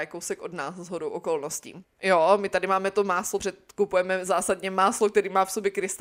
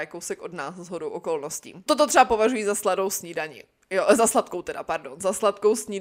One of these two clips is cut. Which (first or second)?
first